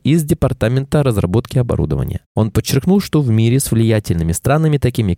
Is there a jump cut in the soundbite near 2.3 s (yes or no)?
yes